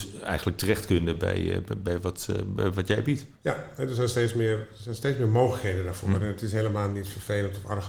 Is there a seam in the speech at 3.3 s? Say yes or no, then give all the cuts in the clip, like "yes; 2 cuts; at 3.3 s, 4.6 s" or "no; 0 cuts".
yes; 1 cut; at 3.3 s